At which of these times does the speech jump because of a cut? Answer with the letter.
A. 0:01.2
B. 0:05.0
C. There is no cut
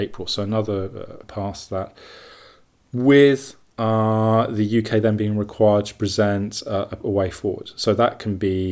A